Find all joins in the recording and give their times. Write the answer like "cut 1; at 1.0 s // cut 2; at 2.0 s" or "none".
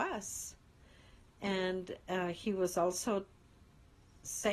none